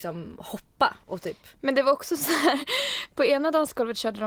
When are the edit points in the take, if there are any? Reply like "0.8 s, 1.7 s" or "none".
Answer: none